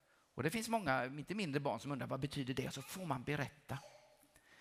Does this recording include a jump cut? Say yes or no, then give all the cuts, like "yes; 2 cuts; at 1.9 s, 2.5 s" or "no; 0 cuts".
no; 0 cuts